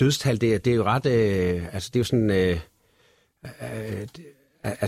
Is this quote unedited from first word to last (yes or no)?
yes